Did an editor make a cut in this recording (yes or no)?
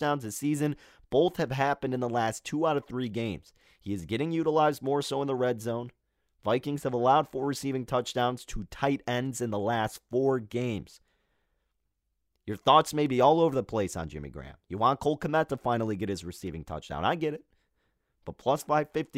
no